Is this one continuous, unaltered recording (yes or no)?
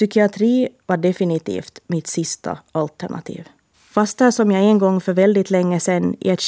no